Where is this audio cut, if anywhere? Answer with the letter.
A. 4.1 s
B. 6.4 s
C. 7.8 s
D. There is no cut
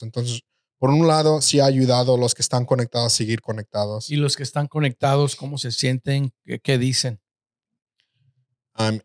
D